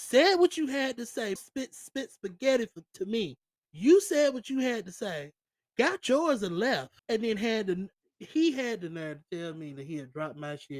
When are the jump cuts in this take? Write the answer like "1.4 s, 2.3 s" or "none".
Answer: 1.4 s, 3.6 s, 7.0 s